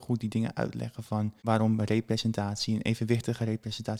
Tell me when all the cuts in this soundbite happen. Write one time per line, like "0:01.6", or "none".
0:01.4